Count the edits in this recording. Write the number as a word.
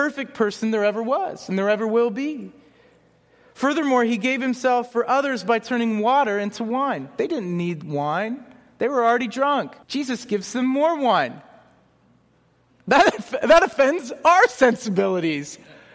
one